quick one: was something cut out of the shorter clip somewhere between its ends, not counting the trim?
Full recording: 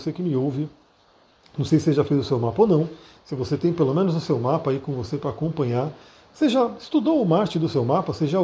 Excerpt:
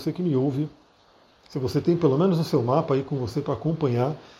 yes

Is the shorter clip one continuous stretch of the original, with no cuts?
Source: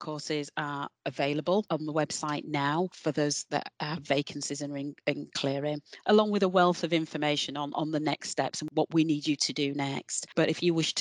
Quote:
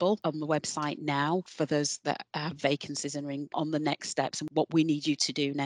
no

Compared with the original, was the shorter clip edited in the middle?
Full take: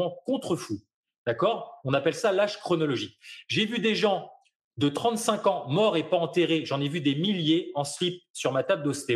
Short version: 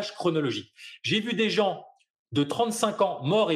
no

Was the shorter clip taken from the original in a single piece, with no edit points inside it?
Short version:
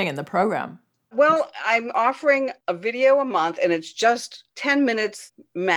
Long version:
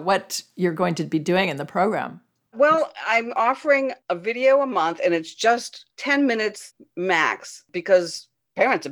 yes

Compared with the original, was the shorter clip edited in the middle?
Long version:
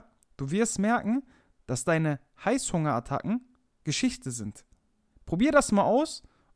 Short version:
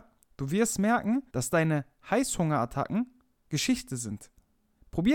yes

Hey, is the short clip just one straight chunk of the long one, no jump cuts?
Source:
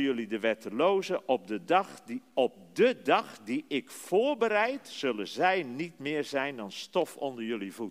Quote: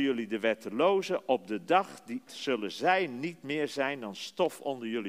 no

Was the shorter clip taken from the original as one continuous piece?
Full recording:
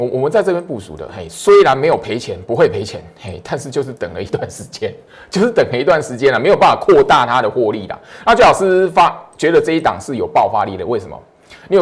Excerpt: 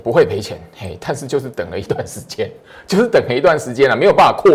yes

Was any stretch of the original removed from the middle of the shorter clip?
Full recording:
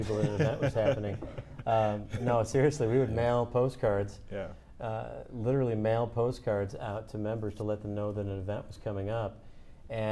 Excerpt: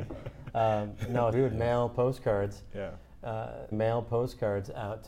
yes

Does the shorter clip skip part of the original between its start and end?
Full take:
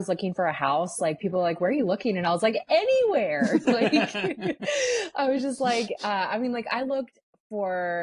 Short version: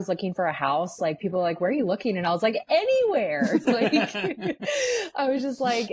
no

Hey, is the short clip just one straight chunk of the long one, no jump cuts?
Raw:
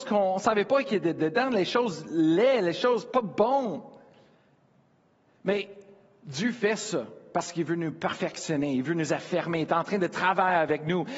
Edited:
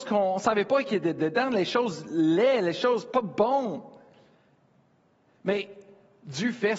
yes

